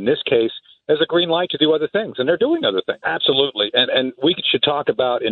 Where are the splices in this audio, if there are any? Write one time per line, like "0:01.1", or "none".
0:03.0